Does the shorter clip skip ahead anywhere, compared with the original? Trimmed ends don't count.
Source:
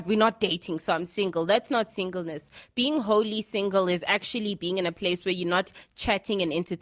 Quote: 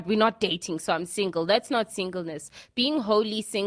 no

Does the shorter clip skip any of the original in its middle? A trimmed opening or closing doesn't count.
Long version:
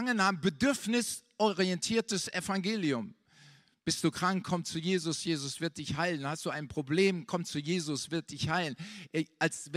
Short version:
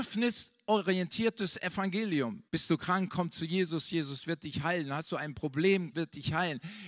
yes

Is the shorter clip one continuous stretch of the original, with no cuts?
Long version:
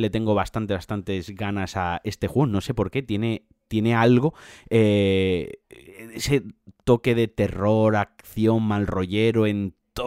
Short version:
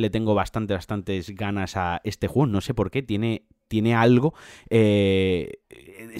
yes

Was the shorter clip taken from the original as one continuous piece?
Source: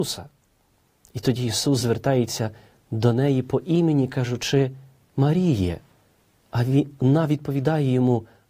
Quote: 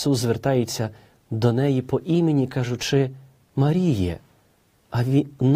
yes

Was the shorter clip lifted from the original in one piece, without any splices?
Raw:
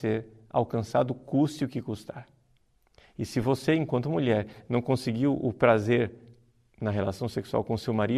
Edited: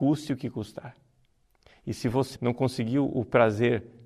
no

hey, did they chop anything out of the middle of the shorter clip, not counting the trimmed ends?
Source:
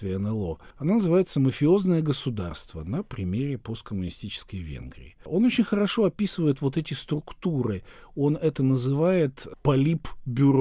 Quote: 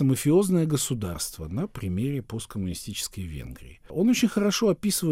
no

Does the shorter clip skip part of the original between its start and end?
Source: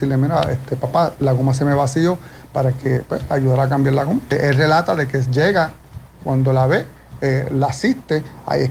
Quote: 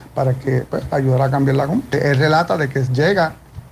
no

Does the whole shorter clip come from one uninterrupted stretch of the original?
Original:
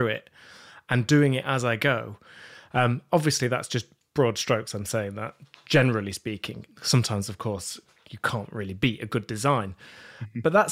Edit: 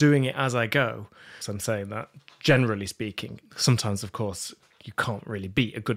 no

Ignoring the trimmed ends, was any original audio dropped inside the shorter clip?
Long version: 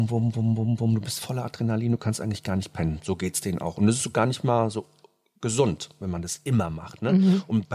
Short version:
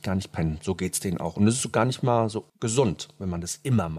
yes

